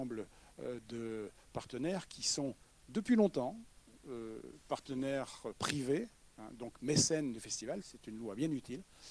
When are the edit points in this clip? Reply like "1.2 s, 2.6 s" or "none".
7.8 s

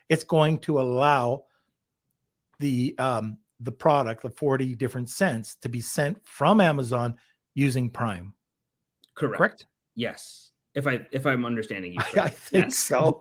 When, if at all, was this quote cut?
none

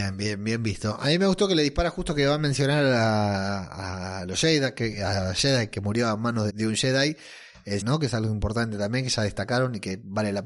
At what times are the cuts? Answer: 6.5 s, 7.8 s

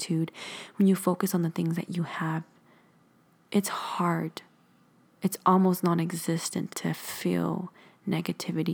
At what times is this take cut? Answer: 6.7 s

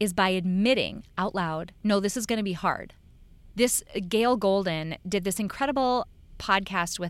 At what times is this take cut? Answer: 3.5 s

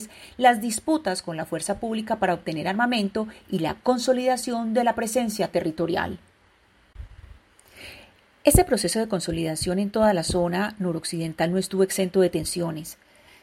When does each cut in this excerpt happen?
none

